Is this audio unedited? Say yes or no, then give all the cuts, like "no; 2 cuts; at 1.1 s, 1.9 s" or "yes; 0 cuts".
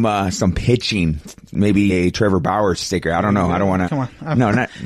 no; 2 cuts; at 1.9 s, 3.8 s